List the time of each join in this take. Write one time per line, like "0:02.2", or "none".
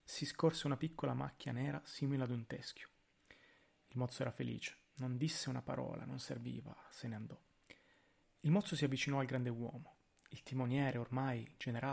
0:08.2

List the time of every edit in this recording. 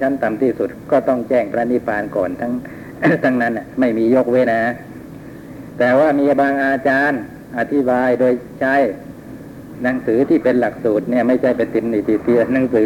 0:04.4

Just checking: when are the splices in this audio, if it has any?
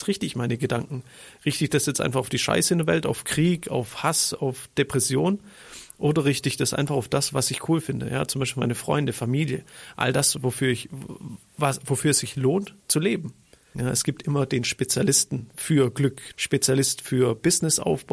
0:13.7
0:16.3

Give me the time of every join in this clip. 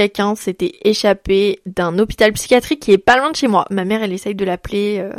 0:03.7

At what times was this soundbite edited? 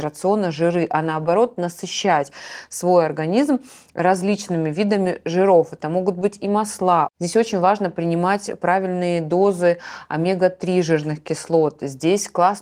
none

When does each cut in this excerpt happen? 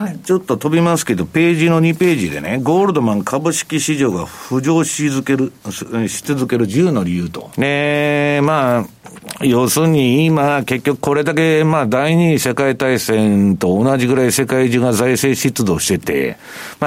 0:07.5

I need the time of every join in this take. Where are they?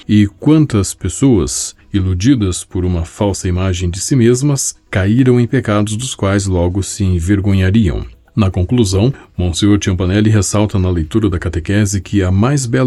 none

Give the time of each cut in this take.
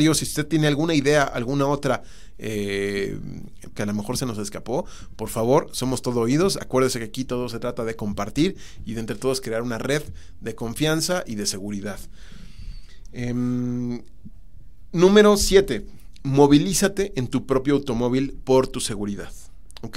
0:03.7

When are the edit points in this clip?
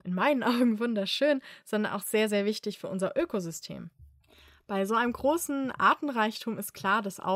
none

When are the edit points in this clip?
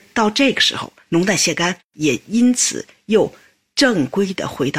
0:01.1

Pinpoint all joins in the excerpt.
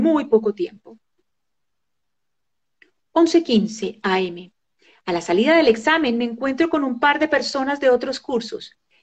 none

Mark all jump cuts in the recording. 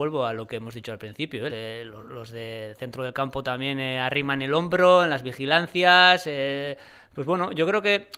0:01.5

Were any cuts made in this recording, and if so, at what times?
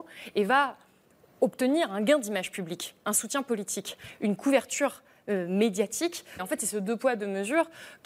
0:06.4

